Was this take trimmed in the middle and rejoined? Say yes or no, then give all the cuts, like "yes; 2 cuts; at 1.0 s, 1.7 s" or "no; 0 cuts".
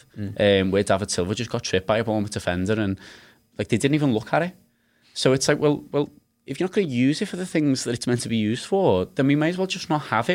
no; 0 cuts